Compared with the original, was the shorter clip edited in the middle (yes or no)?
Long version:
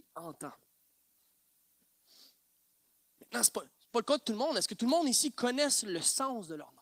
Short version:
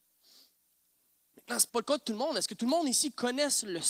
yes